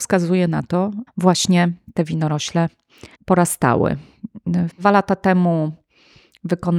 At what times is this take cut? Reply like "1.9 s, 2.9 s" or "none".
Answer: 1.1 s, 3.1 s, 4.7 s